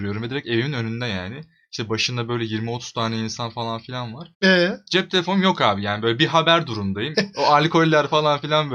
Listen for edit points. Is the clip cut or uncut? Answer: cut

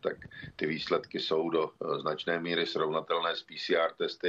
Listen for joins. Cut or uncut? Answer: uncut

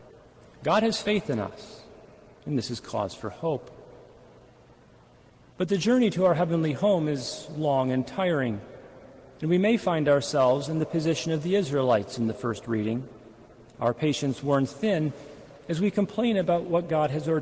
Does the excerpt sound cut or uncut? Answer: uncut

